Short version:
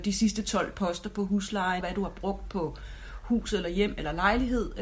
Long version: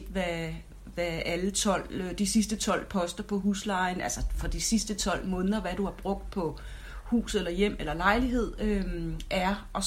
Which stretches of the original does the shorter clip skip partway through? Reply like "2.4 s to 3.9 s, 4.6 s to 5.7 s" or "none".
3.9 s to 5.6 s